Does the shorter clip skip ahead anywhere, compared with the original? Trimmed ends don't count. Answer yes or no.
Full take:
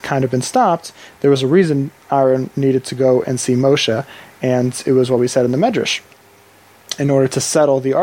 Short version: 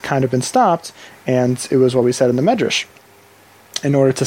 yes